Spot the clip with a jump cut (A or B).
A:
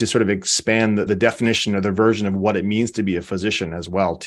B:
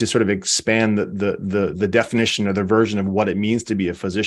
A